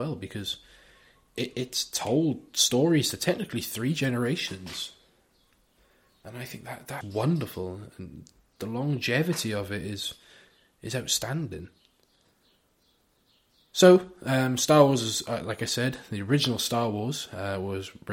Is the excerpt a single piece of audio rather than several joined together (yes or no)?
no